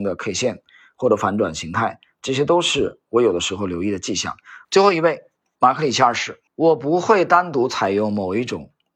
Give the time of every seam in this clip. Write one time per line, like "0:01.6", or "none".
0:04.6
0:06.5